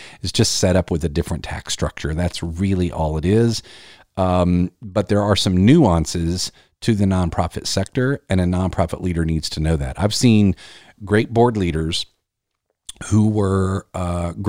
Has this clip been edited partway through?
no; 0 cuts

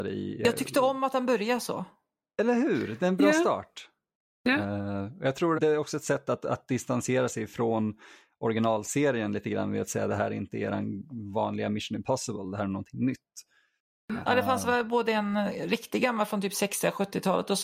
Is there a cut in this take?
yes; 2 cuts; at 5.5 s, 14.2 s

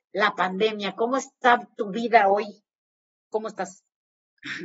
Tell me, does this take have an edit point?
no; 0 cuts

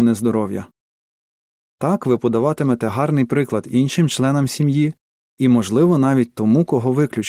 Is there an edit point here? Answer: no; 0 cuts

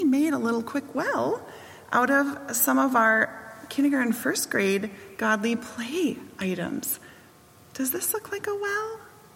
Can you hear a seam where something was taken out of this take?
no; 0 cuts

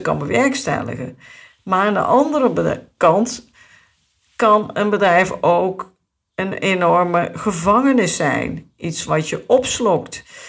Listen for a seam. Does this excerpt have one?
no; 0 cuts

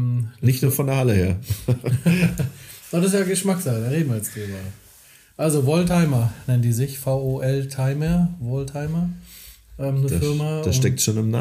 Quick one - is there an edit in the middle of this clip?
no; 0 cuts

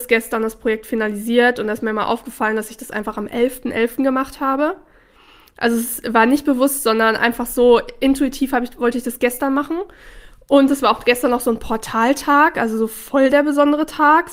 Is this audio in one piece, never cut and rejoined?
yes; 0 cuts

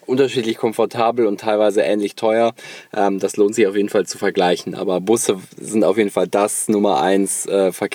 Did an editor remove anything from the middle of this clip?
no; 0 cuts

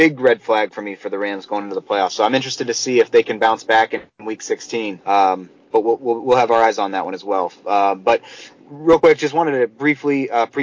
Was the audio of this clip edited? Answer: yes; 1 cut; at 5.0 s

